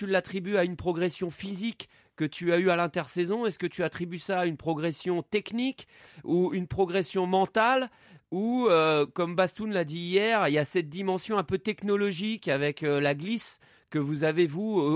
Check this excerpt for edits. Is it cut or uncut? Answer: uncut